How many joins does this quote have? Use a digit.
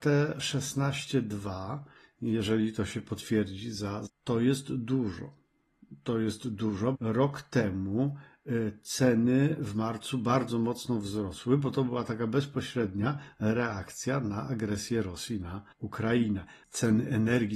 3